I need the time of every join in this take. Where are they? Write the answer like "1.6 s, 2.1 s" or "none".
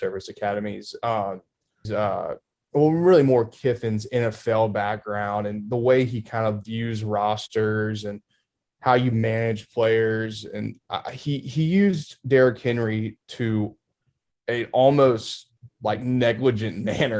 1.8 s